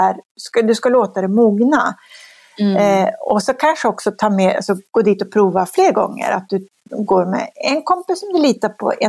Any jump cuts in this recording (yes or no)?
yes